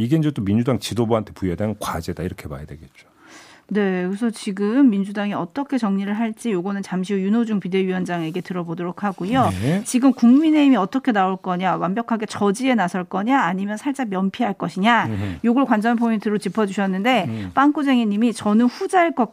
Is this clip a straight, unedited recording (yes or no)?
yes